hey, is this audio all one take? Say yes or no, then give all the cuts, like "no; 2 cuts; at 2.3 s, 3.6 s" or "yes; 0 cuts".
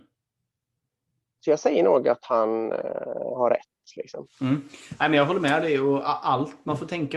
yes; 0 cuts